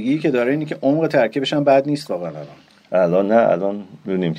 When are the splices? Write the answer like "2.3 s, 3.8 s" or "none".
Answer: none